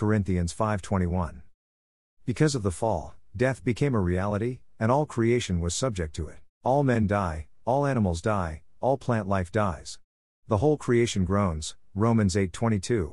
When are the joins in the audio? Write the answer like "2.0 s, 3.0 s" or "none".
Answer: 6.5 s